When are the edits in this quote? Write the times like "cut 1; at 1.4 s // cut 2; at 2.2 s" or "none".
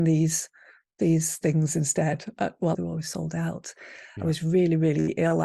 cut 1; at 2.7 s // cut 2; at 4.2 s